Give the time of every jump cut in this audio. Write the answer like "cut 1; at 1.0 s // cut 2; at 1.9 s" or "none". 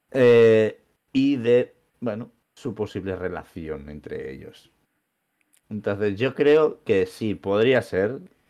cut 1; at 2.4 s